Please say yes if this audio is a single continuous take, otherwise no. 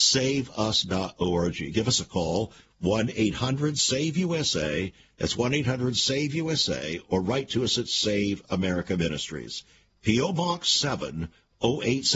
yes